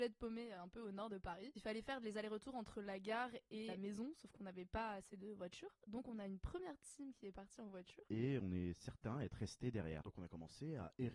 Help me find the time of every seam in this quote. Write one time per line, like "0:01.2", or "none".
none